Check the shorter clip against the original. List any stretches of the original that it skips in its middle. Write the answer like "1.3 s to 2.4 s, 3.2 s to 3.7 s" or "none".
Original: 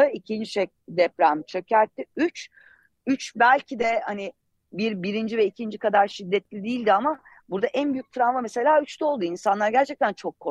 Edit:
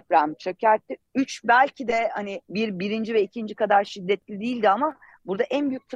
2.1 s to 2.9 s, 4.4 s to 4.7 s